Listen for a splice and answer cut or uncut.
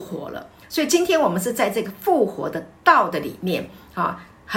uncut